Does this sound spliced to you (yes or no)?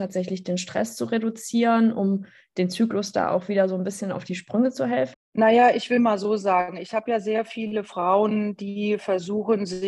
yes